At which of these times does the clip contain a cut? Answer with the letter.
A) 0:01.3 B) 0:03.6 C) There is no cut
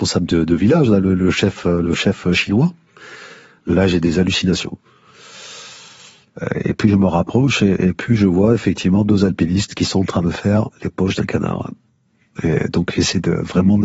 B